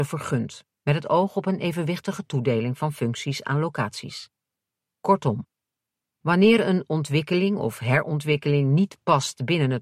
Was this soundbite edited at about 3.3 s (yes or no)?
no